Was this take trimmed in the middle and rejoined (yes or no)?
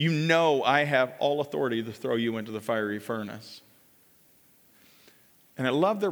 no